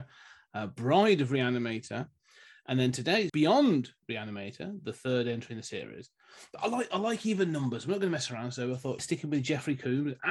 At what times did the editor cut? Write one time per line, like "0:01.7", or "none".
0:03.3
0:09.0

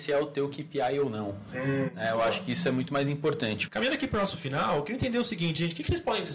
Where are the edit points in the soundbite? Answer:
0:03.7

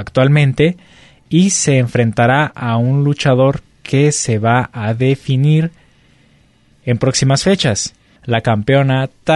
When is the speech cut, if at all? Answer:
0:08.2

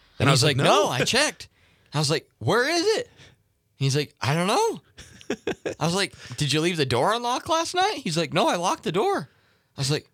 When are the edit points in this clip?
none

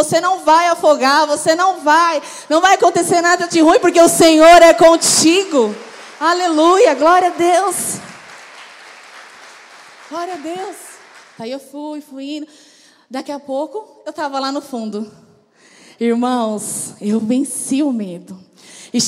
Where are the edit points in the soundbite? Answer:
0:11.4

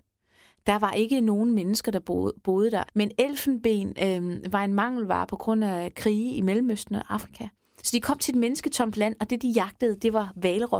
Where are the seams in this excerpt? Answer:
0:02.9
0:07.8

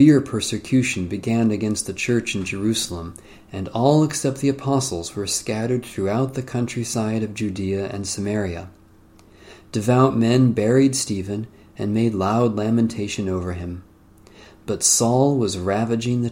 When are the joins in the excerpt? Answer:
none

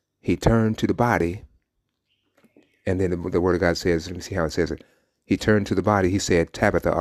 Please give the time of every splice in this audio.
none

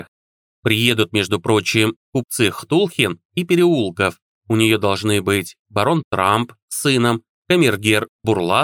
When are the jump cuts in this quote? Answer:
0:04.3
0:07.4

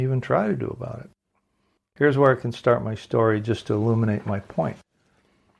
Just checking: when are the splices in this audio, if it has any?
0:01.8

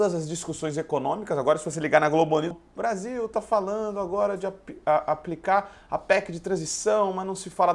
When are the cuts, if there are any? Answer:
0:02.5

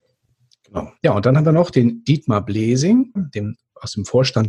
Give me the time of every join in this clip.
0:01.0
0:03.2

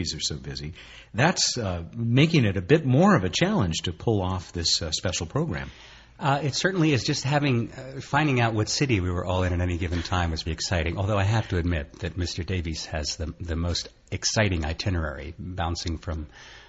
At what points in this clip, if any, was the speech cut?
0:10.4

